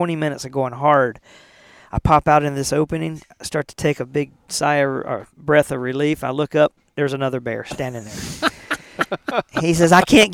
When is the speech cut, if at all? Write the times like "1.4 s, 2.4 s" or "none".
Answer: none